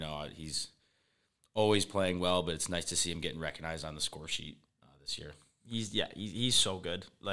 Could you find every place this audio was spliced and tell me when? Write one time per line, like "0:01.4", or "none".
none